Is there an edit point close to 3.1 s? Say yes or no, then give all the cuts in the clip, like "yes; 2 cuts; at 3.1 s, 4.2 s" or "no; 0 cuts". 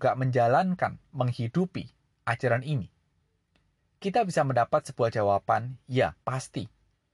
no; 1 cut; at 6.2 s